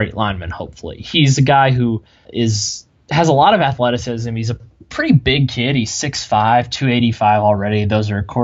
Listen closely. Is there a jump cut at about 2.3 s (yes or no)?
yes